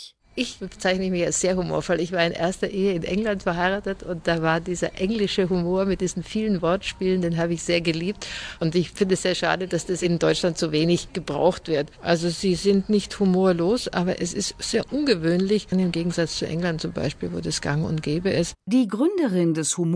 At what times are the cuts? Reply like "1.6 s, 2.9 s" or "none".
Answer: 15.7 s